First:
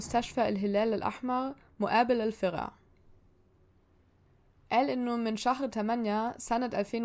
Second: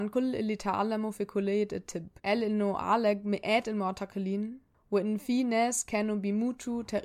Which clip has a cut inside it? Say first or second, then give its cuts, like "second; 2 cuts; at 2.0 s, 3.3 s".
second; 1 cut; at 2.2 s